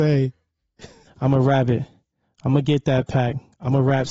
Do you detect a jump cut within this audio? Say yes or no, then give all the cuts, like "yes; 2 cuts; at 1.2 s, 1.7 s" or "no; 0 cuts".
yes; 1 cut; at 1.1 s